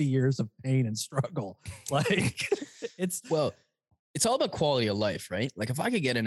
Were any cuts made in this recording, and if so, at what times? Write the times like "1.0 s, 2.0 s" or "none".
none